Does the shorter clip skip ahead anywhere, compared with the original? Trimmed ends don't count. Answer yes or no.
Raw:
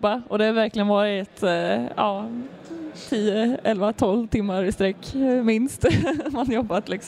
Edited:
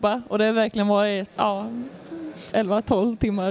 yes